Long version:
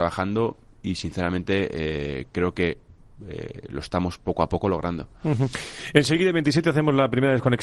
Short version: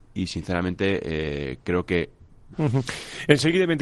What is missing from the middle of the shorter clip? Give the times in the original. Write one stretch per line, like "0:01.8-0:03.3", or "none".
0:03.2-0:05.2